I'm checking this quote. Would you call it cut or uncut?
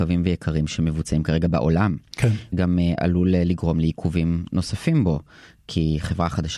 uncut